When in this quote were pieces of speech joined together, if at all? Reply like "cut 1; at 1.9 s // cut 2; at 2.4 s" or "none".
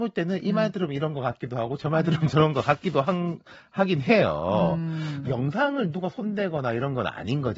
cut 1; at 5.3 s